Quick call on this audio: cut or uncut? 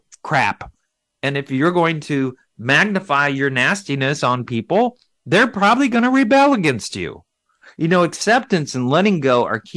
uncut